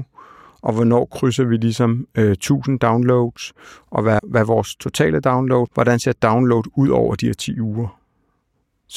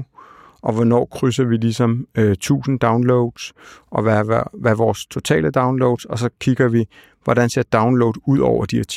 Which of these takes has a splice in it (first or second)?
first